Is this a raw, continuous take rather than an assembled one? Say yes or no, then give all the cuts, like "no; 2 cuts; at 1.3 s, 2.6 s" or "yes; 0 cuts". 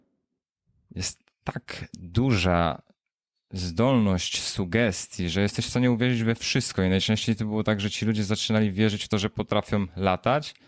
yes; 0 cuts